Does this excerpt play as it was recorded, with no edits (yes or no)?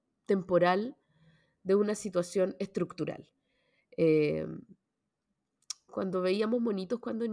no